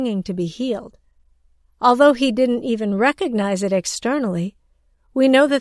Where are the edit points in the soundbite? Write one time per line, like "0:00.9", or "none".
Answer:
none